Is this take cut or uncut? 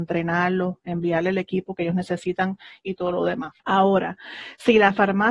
cut